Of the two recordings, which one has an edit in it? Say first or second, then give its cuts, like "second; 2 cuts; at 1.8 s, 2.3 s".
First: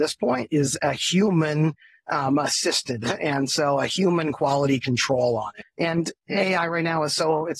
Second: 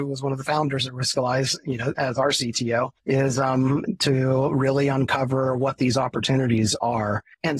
second; 1 cut; at 3.0 s